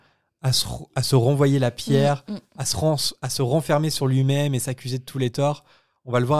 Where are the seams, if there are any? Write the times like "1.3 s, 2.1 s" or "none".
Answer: none